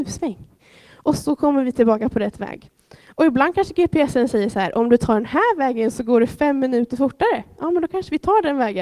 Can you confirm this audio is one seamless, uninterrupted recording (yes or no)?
yes